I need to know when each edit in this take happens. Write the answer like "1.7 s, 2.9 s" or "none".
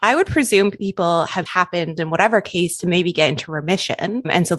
1.5 s